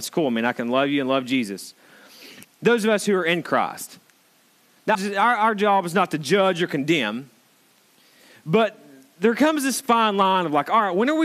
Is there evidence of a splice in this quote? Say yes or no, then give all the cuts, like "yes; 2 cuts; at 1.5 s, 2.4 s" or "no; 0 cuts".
yes; 2 cuts; at 2.4 s, 4.9 s